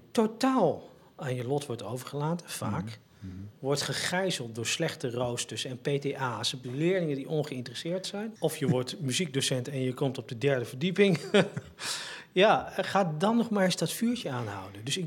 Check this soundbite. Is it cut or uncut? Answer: cut